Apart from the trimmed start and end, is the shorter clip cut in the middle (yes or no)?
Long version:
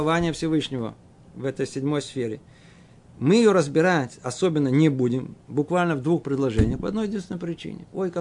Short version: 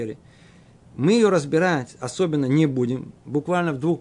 no